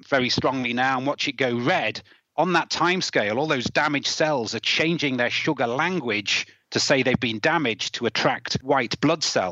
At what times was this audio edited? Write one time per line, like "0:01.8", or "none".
none